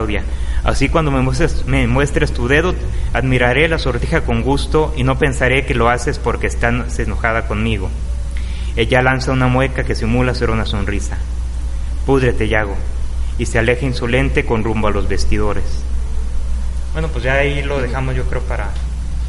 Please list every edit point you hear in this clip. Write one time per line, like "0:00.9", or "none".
none